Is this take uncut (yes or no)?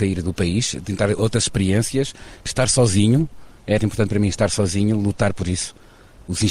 no